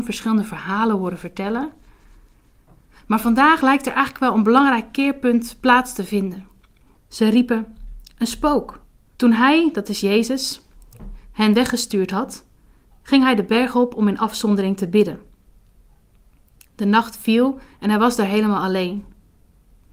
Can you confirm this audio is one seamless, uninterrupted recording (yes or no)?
no